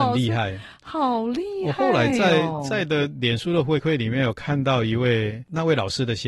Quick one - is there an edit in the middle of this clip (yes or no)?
no